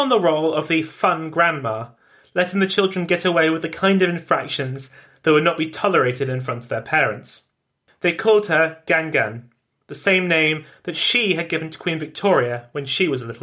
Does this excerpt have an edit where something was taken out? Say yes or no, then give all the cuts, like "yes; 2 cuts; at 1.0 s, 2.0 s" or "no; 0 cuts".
no; 0 cuts